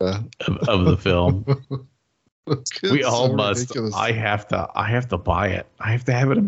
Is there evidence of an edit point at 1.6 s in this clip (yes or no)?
yes